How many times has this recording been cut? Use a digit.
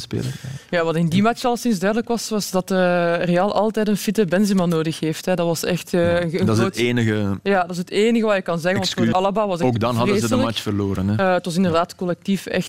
1